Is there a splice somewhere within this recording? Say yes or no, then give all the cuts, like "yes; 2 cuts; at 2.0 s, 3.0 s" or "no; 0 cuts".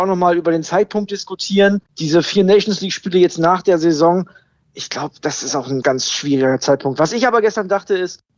yes; 1 cut; at 5.8 s